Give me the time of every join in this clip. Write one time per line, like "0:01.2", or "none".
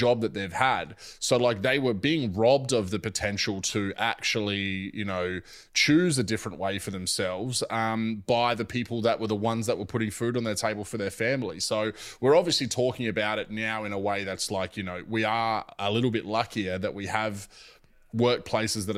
none

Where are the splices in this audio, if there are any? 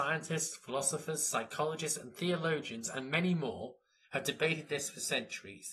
none

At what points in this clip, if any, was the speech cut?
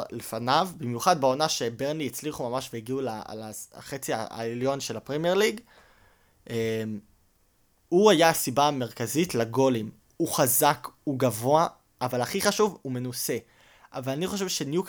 none

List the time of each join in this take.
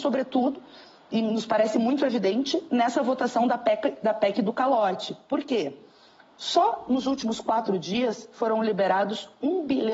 none

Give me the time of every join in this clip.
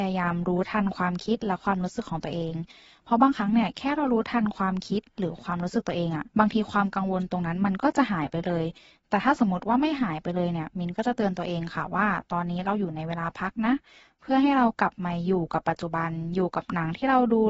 0:06.3

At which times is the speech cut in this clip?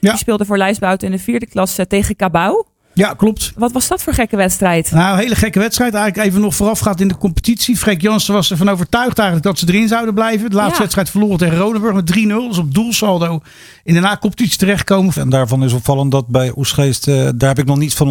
0:15.1

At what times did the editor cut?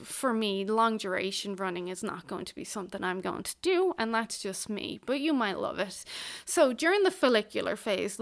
none

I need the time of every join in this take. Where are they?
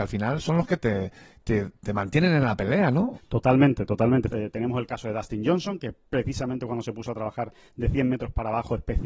0:03.1
0:04.3

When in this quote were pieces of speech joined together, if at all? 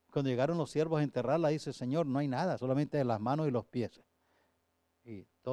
0:02.6

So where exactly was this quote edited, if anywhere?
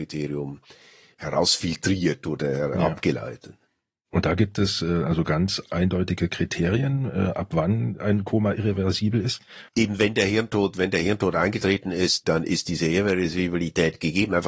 0:09.7

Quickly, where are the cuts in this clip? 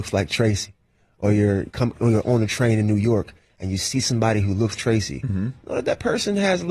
0:01.7
0:04.8

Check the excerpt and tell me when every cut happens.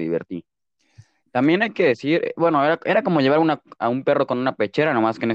0:01.2

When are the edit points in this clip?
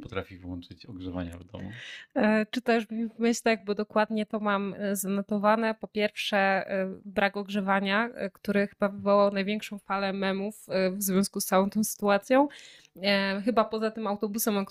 none

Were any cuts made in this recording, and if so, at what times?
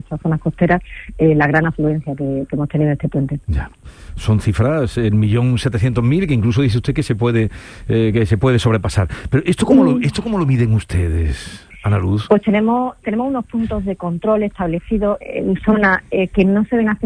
0:03.4
0:15.2

